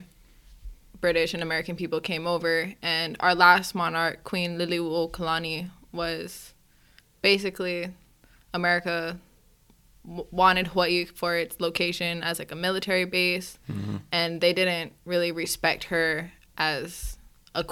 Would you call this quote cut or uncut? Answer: uncut